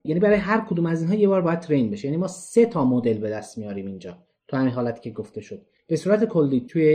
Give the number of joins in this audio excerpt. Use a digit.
0